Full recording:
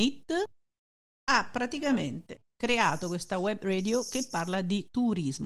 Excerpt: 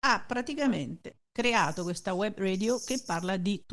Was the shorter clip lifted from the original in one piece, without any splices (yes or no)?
yes